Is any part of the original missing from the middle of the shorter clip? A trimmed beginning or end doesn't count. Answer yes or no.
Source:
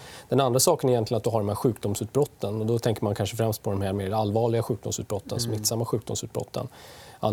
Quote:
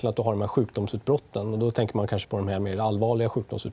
yes